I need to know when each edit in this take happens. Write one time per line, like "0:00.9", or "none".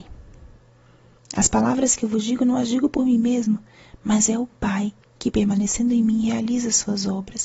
0:01.2